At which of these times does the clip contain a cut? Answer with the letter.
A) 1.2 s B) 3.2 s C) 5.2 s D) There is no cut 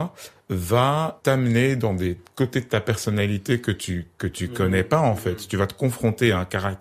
A